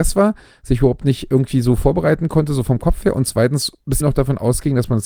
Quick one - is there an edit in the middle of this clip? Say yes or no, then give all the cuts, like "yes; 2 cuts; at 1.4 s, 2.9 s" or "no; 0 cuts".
yes; 1 cut; at 4.0 s